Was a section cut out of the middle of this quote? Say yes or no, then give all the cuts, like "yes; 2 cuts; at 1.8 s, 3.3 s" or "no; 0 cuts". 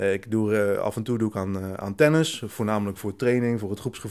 no; 0 cuts